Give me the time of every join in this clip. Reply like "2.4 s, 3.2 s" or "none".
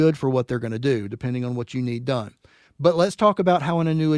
none